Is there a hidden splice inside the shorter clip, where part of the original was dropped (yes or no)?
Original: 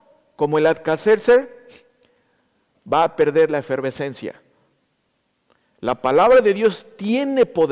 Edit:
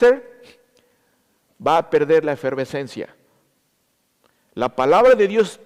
no